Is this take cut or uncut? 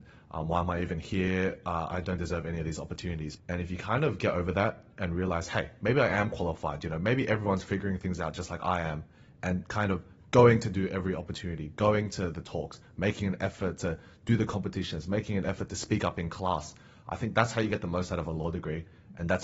cut